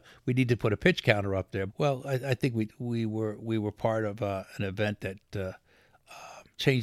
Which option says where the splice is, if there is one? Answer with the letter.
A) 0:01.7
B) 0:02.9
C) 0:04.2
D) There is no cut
A